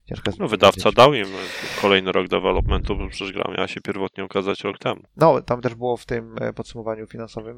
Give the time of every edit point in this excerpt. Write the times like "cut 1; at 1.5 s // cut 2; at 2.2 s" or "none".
cut 1; at 5.1 s